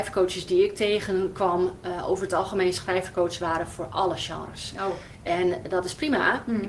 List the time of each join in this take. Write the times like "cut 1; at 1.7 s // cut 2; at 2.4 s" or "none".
none